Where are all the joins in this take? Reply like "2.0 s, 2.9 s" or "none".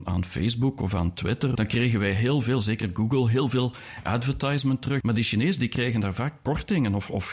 1.6 s, 5.0 s